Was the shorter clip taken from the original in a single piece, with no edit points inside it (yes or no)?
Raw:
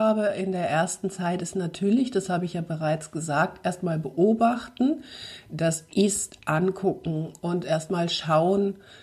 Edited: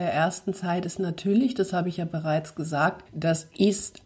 no